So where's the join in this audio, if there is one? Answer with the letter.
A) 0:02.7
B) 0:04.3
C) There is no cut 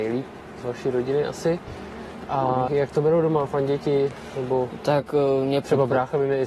A